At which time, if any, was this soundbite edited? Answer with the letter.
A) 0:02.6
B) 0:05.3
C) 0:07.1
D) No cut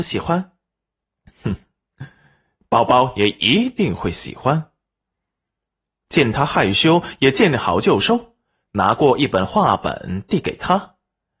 A